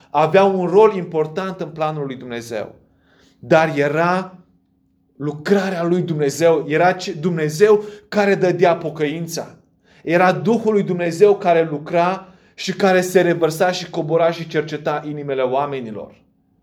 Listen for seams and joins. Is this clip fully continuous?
yes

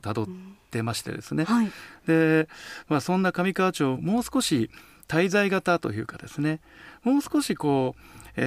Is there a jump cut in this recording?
yes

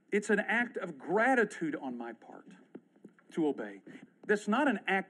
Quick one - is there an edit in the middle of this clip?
yes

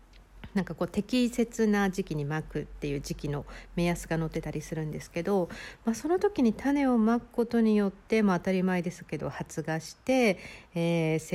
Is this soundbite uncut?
yes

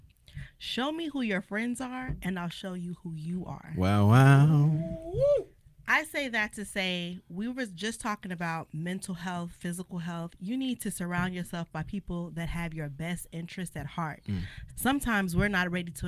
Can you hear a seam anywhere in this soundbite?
yes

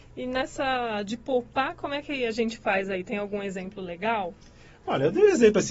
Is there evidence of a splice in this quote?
no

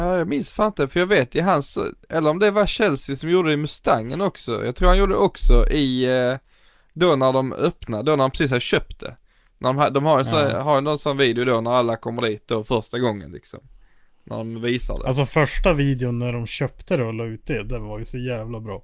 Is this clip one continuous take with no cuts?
yes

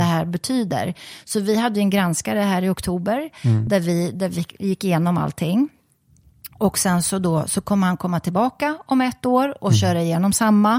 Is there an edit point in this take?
no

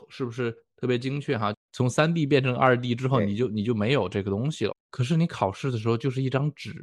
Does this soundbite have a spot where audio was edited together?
yes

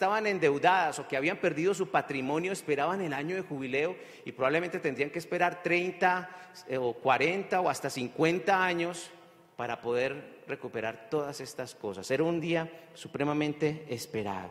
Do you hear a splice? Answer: no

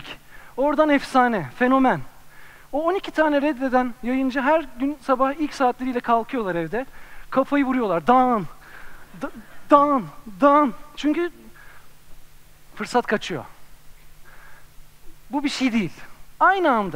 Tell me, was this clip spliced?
no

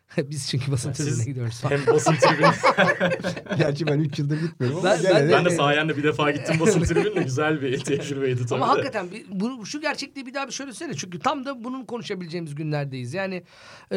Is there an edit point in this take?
yes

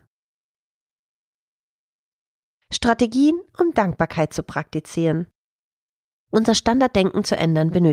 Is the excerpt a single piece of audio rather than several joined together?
yes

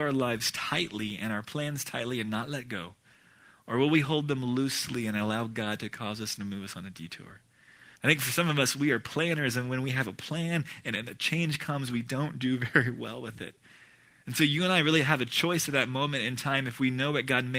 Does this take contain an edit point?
yes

